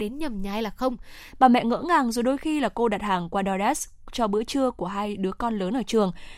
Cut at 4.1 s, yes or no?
no